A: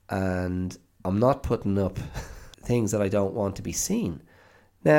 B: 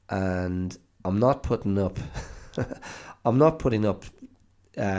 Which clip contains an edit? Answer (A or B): A